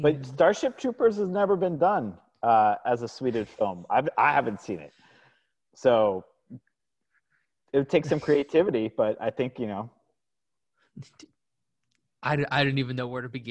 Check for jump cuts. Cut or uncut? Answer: uncut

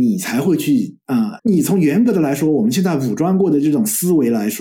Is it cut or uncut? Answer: cut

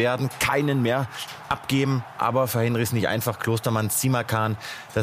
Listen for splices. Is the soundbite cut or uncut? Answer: uncut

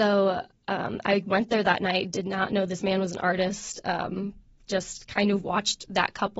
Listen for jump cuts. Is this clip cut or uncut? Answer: uncut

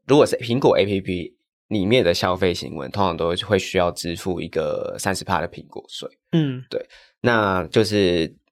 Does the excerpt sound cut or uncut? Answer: uncut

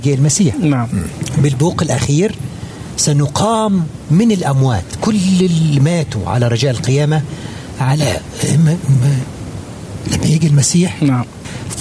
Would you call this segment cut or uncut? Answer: uncut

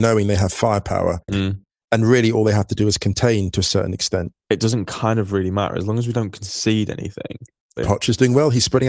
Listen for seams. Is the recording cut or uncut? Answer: cut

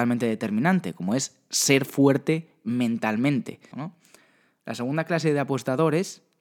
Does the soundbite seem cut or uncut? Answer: cut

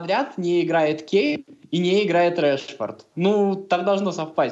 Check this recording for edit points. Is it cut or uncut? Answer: uncut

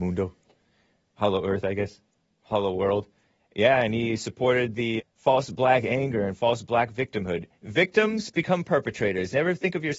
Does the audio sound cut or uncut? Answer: cut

